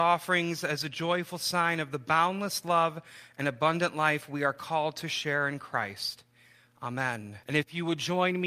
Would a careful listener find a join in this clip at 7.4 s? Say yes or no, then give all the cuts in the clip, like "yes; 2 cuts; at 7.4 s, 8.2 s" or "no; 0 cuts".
yes; 1 cut; at 7.4 s